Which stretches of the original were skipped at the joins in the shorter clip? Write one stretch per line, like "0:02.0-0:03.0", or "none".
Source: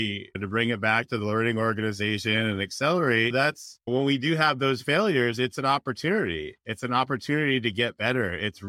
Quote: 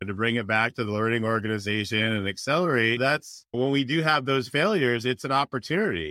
none